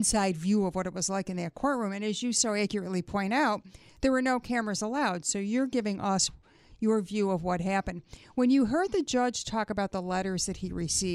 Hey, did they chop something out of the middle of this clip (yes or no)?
no